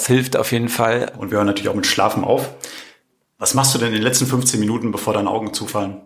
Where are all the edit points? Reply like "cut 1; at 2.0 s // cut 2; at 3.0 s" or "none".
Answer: cut 1; at 1.1 s